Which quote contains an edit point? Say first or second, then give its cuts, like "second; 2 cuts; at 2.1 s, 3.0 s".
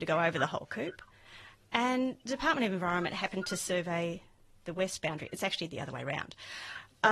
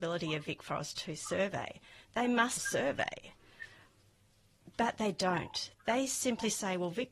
second; 1 cut; at 2.6 s